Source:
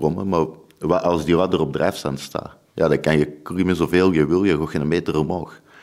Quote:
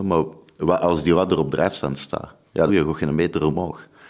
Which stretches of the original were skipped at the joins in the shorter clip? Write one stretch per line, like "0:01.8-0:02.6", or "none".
0:02.9-0:04.4